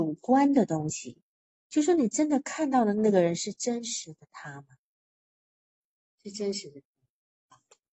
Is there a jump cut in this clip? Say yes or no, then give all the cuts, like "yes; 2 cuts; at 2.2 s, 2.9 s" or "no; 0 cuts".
no; 0 cuts